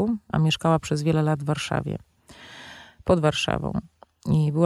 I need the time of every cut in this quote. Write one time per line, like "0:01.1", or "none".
none